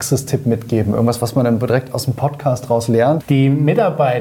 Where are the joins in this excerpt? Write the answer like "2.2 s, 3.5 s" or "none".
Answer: 3.2 s